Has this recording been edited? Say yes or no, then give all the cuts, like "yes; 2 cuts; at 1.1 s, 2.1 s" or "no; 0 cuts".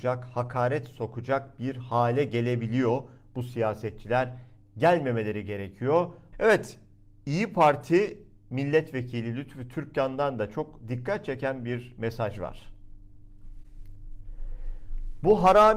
yes; 1 cut; at 6.3 s